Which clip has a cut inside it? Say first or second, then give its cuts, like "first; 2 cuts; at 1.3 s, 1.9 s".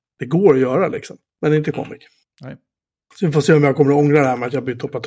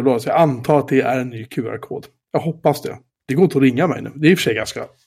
second; 1 cut; at 3.1 s